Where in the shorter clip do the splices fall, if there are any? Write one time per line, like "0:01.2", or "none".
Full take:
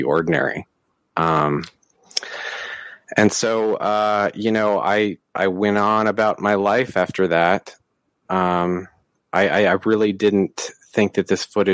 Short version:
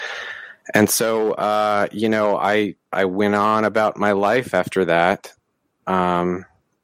none

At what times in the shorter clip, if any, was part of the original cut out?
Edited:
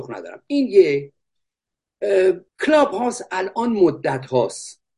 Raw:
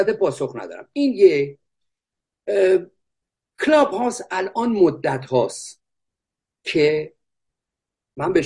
0:02.5

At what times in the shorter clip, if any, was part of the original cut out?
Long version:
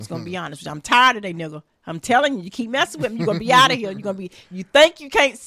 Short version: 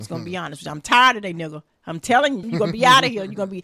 0:02.4

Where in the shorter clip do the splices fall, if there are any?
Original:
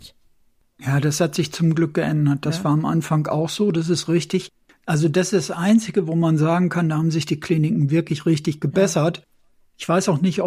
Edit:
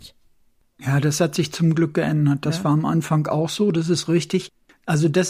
none

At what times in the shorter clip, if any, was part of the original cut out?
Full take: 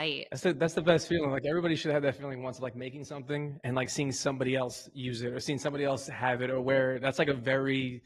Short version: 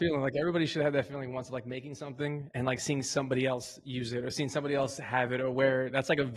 none

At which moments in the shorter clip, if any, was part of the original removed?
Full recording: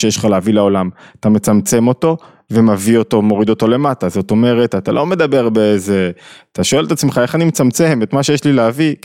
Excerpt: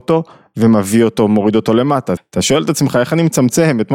0:02.2

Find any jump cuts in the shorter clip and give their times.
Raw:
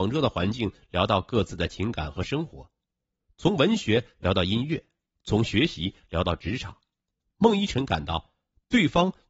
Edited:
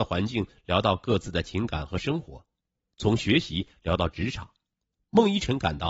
0:02.9

